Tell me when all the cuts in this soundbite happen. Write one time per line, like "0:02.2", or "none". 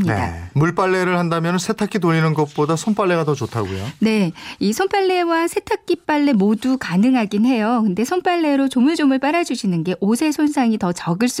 none